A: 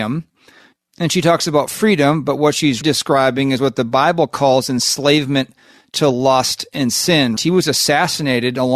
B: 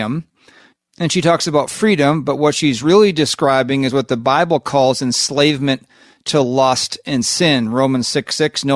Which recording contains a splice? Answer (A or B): A